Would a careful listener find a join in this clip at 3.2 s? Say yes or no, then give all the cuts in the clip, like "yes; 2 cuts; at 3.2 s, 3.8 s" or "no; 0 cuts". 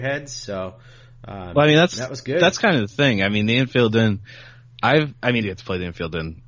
no; 1 cut; at 5.4 s